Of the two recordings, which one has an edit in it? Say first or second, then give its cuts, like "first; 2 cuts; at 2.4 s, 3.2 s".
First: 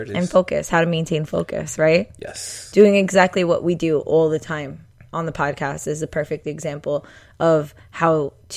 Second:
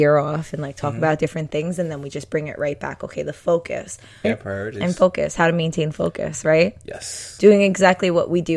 second; 1 cut; at 4.2 s